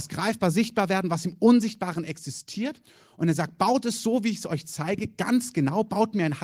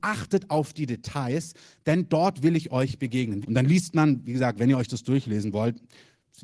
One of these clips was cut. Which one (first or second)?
second